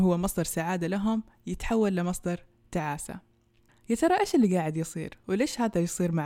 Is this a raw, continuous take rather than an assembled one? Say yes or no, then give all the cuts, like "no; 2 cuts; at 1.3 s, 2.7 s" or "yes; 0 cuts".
yes; 0 cuts